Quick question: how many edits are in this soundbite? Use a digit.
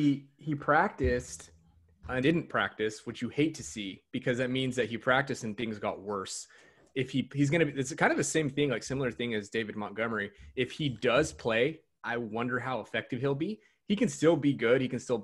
1